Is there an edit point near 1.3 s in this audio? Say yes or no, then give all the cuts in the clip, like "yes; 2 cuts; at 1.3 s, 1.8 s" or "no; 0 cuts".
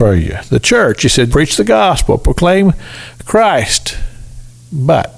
yes; 1 cut; at 1.3 s